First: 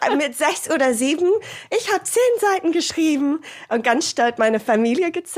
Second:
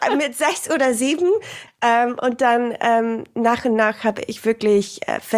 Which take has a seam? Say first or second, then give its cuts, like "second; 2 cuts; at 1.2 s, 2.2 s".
second; 1 cut; at 1.7 s